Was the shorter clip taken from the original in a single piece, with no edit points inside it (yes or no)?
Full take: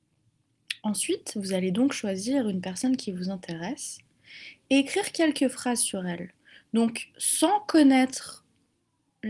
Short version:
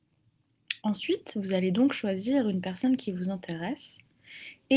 yes